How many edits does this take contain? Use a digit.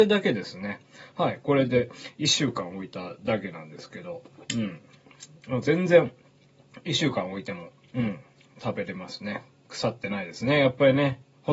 0